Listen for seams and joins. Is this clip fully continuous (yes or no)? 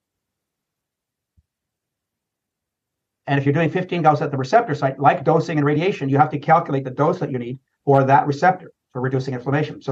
yes